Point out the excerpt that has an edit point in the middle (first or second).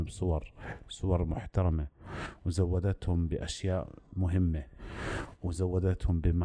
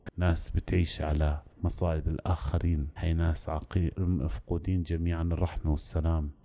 second